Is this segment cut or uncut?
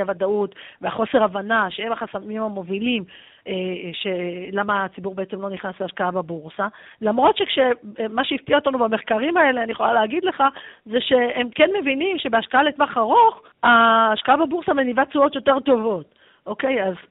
cut